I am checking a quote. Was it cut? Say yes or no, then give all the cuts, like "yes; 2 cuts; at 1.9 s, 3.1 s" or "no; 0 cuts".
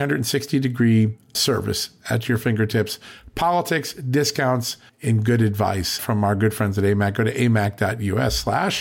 yes; 1 cut; at 4.9 s